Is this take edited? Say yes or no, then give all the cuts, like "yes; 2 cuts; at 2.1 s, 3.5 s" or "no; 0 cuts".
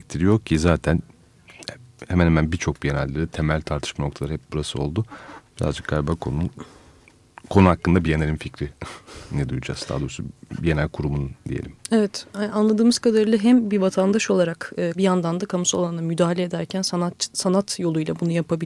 yes; 1 cut; at 14.9 s